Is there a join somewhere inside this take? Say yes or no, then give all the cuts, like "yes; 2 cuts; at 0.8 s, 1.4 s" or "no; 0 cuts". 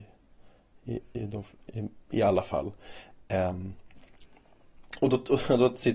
no; 0 cuts